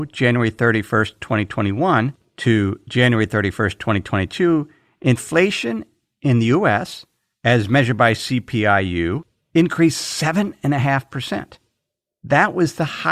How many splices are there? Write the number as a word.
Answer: zero